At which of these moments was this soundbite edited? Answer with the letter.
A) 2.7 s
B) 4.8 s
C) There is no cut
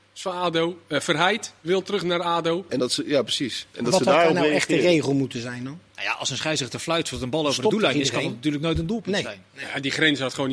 A